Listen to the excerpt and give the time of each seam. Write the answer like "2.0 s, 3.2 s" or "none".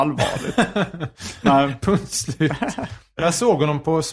1.4 s

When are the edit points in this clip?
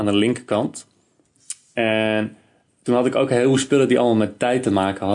none

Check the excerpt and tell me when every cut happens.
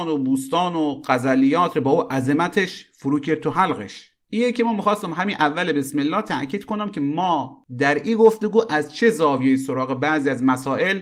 none

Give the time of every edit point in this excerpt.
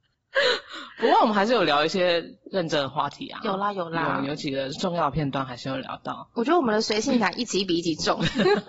none

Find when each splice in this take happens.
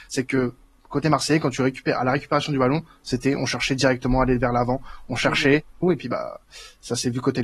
5.8 s

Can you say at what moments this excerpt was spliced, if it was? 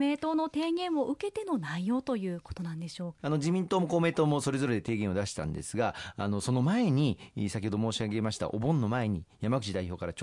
3.2 s

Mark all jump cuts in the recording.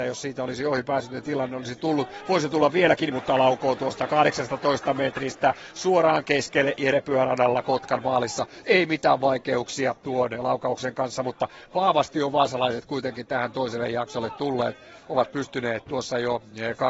3.1 s

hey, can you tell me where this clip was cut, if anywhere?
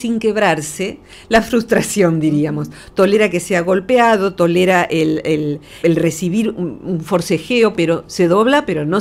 5.8 s, 7.7 s

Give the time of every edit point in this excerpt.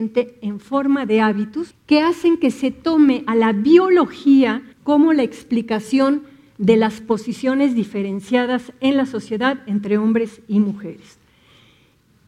1.7 s, 4.7 s

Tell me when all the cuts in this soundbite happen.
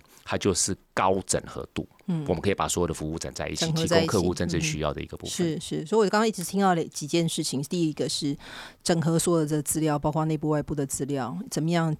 none

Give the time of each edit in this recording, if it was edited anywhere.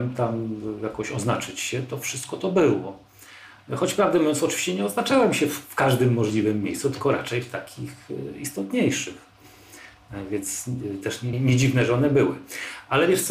11.3 s

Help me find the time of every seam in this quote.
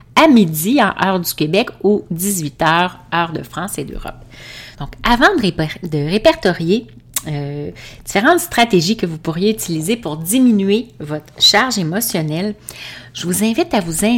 4.7 s

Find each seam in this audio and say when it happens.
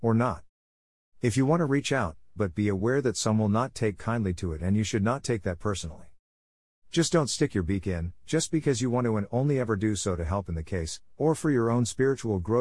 2.4 s, 11.1 s

